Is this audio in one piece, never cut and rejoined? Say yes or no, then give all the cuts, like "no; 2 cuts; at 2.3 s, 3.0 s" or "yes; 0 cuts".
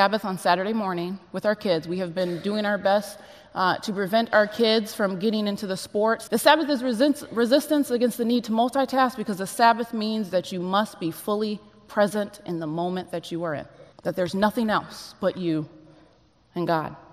no; 2 cuts; at 6.3 s, 13.9 s